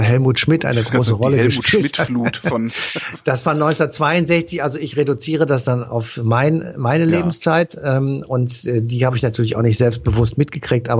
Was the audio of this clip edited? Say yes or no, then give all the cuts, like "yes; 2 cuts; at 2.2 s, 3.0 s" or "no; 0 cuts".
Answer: no; 0 cuts